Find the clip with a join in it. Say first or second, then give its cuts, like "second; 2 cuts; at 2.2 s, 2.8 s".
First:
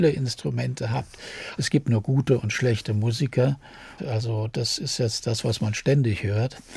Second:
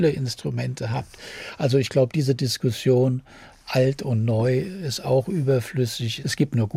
first; 2 cuts; at 1.6 s, 4.0 s